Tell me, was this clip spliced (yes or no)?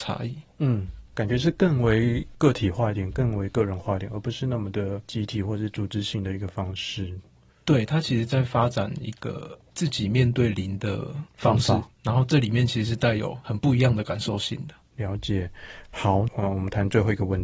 yes